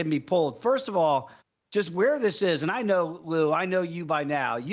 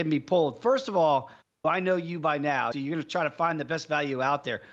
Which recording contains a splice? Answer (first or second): second